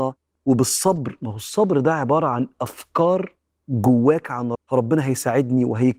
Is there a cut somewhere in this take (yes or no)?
yes